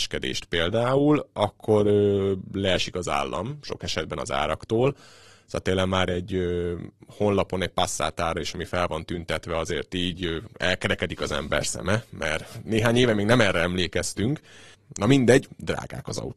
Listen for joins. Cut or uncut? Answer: uncut